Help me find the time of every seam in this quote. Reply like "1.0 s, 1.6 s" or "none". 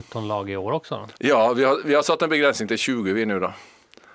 1.2 s